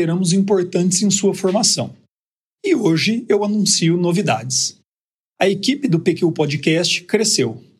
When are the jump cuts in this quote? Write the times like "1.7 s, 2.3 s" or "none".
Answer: none